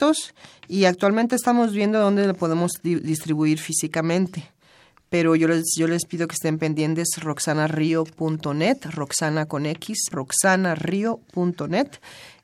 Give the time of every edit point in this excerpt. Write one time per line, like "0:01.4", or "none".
0:10.1